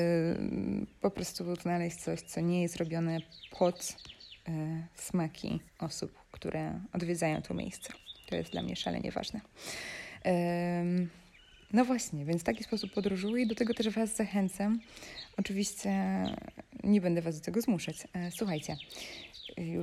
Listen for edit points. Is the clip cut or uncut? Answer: cut